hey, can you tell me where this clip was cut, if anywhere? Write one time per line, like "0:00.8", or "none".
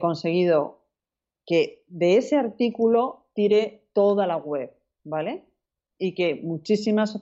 none